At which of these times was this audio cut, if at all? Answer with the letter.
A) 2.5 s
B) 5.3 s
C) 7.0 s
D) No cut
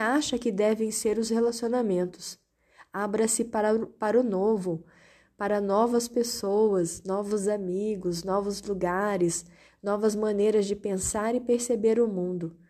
D